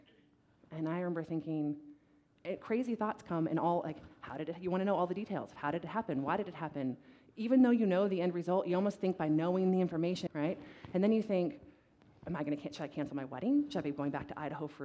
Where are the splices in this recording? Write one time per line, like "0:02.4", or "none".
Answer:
0:10.3